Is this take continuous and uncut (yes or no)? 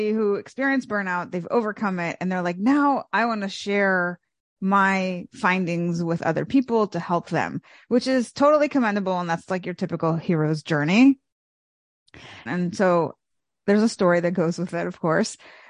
no